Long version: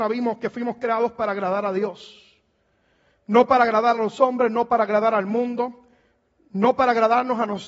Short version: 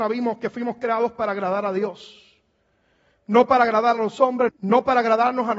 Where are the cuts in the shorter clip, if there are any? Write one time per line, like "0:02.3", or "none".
0:04.5